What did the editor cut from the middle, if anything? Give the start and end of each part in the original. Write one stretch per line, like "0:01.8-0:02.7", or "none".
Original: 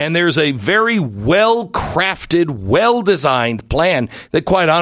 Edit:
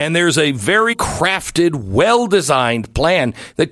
0:00.9-0:01.7